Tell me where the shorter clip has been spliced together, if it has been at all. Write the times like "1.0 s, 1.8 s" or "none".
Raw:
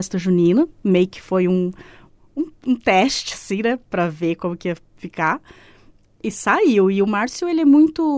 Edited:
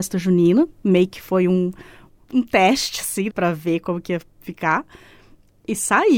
2.2 s, 3.3 s